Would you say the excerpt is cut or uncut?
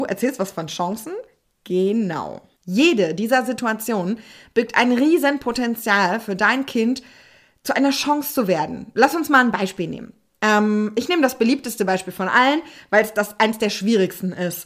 uncut